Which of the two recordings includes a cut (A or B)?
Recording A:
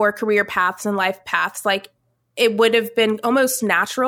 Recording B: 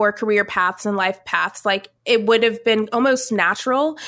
B